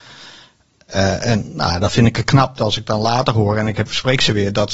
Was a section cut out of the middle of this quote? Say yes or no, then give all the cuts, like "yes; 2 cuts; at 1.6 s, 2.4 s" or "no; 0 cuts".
no; 0 cuts